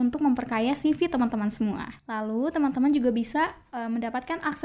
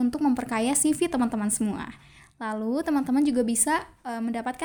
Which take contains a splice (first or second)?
first